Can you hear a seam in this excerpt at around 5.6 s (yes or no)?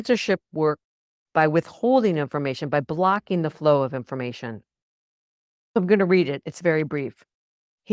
yes